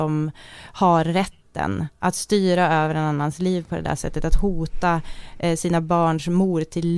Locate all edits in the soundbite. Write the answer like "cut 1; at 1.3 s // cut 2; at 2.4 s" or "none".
none